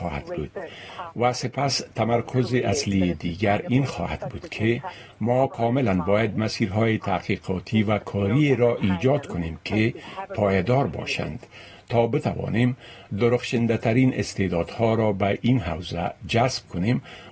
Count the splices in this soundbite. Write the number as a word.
zero